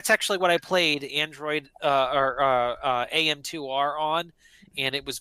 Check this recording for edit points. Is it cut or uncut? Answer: uncut